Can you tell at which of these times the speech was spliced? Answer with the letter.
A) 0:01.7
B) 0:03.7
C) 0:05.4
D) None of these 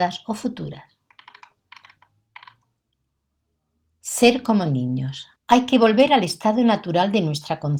C